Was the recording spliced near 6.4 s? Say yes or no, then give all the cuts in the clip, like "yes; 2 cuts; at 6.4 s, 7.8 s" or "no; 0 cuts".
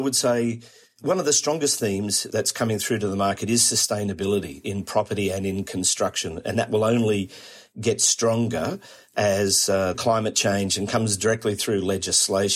no; 1 cut; at 9.9 s